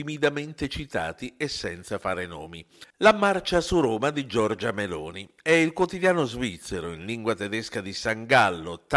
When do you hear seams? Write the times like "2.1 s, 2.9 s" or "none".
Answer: 2.9 s